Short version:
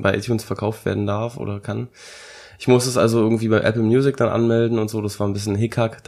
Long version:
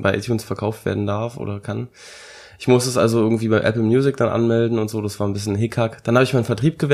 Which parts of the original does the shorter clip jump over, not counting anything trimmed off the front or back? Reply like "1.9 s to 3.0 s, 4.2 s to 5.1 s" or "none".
none